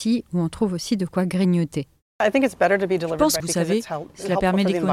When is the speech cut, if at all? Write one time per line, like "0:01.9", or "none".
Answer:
0:03.4